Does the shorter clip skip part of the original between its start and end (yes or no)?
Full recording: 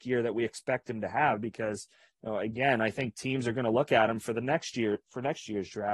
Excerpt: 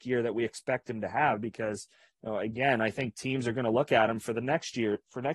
no